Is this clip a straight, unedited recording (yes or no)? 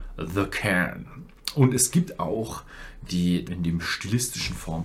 no